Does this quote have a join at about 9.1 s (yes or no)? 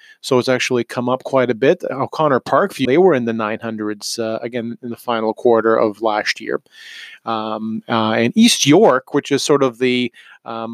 no